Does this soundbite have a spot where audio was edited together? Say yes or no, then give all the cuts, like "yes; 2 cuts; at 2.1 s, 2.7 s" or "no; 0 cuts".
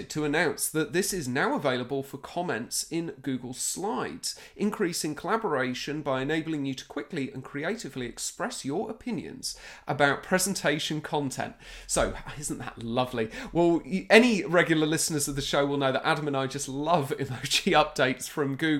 no; 0 cuts